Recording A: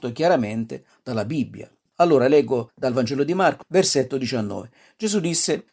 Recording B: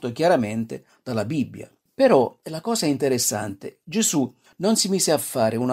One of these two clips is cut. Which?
A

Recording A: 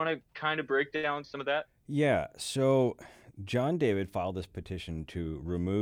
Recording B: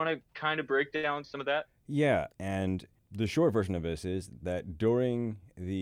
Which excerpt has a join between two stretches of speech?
B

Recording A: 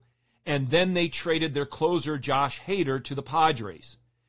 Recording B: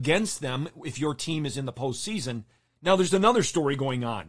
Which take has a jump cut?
B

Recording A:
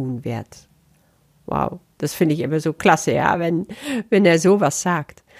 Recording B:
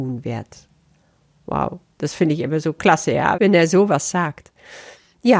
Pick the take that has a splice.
B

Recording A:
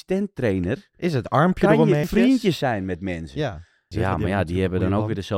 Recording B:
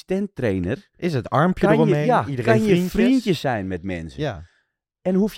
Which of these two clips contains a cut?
A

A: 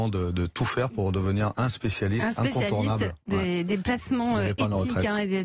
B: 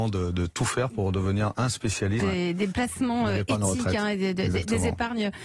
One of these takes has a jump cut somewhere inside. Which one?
B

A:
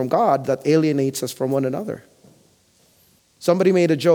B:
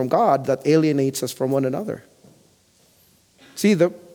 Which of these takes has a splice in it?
A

